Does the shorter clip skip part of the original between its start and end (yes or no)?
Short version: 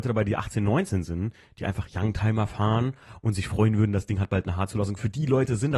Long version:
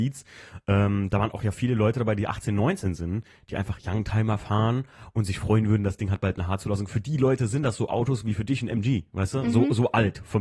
no